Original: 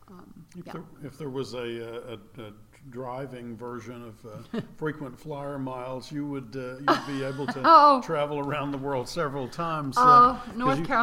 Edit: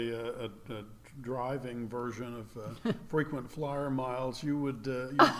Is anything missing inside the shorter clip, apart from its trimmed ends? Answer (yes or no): no